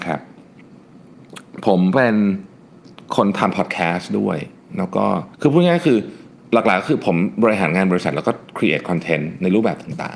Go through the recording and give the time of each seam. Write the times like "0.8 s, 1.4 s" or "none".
3.1 s, 5.3 s